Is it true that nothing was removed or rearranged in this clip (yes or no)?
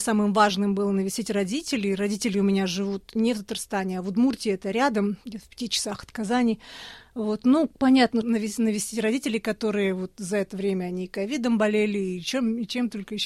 no